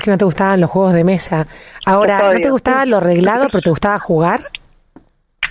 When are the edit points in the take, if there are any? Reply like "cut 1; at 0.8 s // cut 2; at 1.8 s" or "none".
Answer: none

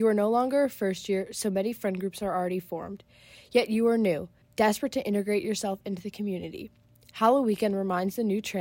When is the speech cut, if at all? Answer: cut 1; at 4.4 s

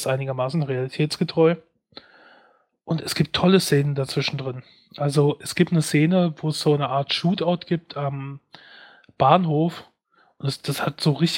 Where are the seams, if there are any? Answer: none

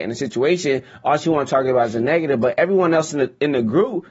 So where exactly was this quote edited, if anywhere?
none

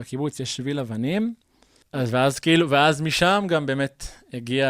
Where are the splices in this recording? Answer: cut 1; at 1.8 s

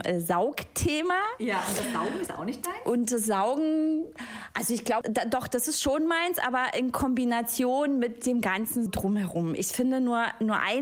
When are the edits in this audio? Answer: cut 1; at 5.0 s // cut 2; at 8.9 s

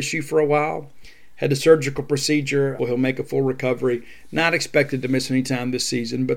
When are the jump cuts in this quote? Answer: cut 1; at 2.8 s

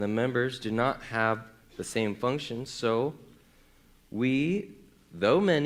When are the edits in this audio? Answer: none

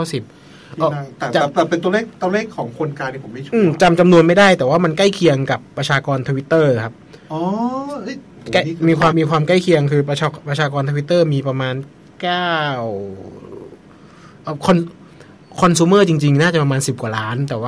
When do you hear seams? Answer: cut 1; at 9.1 s

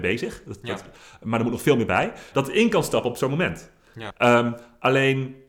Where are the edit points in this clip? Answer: cut 1; at 2.3 s // cut 2; at 4.1 s

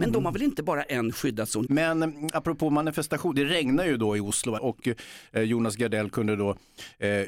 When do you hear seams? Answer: cut 1; at 1.7 s // cut 2; at 4.6 s

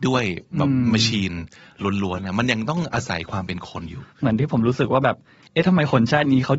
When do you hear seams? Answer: none

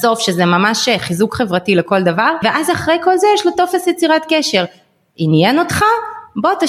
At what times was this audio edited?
none

